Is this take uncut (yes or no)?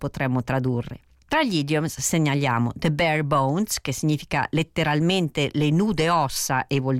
yes